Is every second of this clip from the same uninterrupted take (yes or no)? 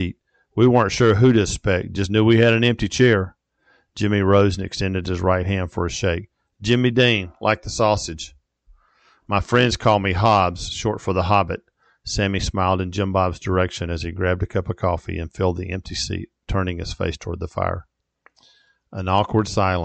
yes